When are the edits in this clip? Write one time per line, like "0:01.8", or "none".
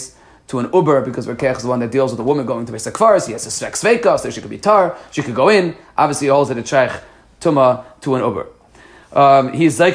none

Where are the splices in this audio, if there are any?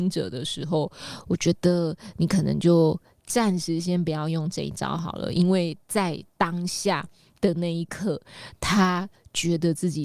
none

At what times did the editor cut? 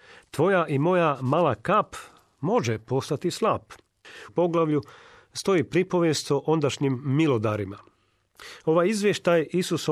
0:04.3

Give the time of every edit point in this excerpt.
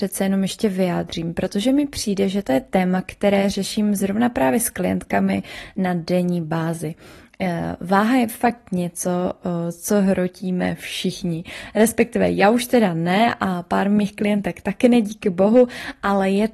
none

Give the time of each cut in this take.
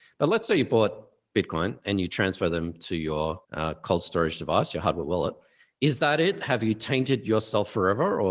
0:03.4

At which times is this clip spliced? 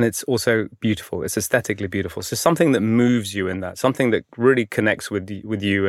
none

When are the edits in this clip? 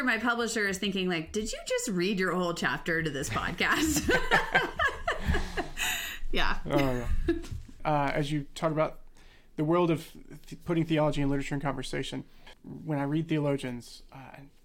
0:12.5

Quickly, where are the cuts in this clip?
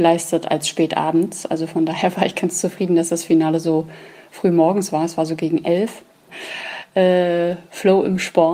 0:06.3

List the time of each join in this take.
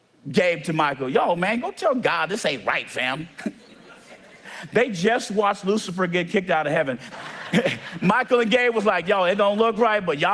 0:07.1

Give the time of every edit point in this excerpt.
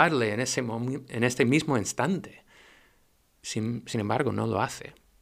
none

